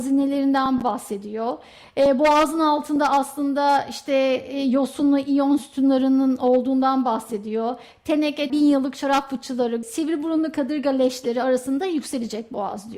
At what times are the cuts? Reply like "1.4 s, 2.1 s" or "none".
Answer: 8.5 s, 9.8 s